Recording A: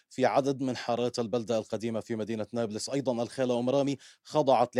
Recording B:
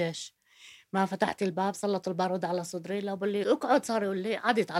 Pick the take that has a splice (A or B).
B